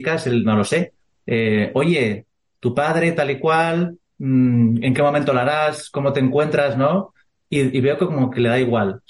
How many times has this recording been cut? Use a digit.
0